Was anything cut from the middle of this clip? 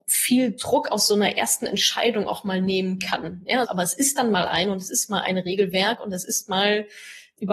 yes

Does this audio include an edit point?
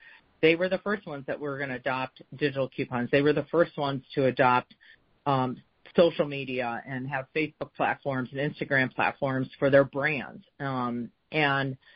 no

